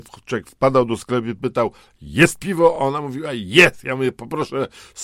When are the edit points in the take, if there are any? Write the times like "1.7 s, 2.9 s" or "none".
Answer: none